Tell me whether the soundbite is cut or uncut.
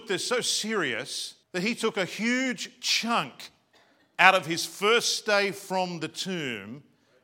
cut